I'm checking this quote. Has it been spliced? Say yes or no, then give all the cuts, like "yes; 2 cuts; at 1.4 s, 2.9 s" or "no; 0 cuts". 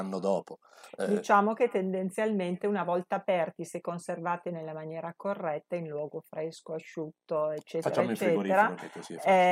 no; 0 cuts